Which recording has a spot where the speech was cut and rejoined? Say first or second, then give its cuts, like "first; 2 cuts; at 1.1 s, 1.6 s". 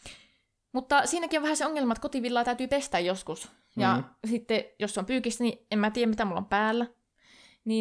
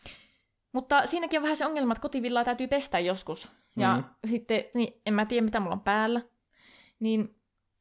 second; 1 cut; at 4.7 s